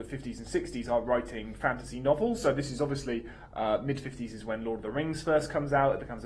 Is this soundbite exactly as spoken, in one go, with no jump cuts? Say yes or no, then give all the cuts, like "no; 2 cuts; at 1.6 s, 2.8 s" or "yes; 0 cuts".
yes; 0 cuts